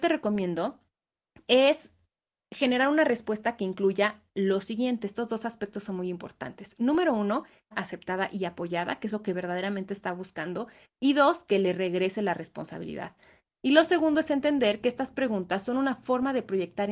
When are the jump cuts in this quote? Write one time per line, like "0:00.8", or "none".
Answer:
0:07.7
0:13.4